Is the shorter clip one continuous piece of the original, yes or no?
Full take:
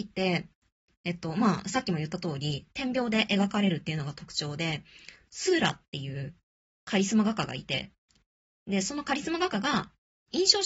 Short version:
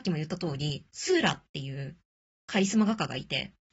no